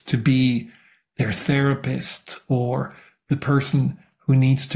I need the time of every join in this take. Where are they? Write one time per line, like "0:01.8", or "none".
none